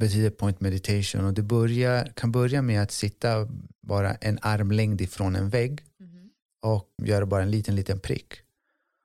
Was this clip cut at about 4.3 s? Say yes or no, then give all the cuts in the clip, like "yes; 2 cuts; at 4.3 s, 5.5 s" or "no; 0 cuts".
no; 1 cut; at 7.0 s